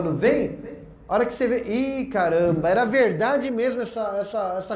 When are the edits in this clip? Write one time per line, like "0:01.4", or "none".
none

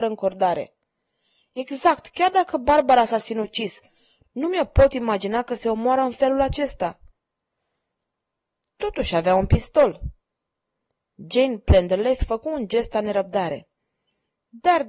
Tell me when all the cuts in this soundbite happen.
none

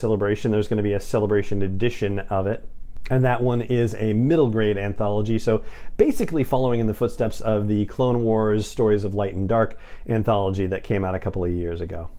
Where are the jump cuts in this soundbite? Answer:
none

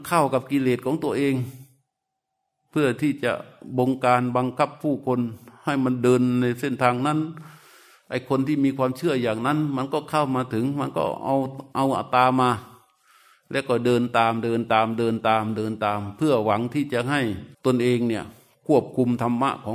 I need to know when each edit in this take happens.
0:17.5

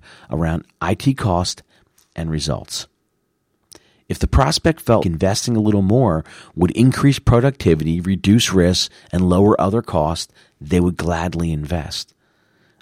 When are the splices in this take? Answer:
0:05.0

